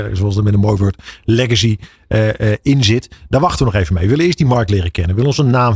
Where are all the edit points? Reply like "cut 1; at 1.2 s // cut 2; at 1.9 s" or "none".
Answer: none